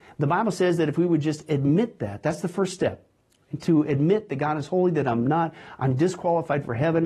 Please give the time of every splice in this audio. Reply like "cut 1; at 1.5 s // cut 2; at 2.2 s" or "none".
none

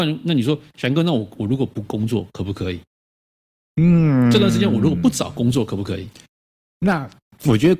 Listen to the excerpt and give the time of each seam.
none

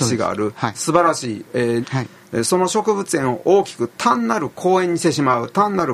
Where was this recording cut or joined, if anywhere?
cut 1; at 1.8 s

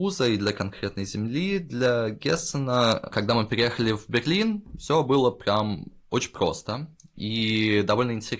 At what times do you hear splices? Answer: none

